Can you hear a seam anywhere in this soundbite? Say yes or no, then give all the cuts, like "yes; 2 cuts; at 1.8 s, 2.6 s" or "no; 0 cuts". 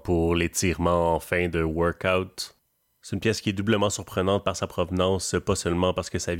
no; 0 cuts